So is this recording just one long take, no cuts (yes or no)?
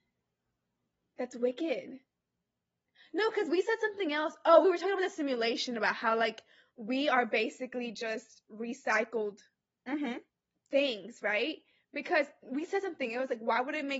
yes